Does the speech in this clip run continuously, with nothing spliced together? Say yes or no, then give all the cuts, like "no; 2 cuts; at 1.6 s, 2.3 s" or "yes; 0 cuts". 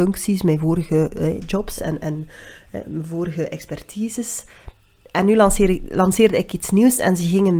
yes; 0 cuts